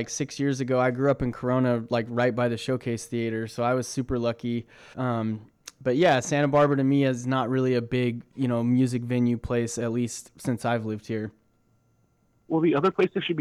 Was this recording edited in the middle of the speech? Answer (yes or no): yes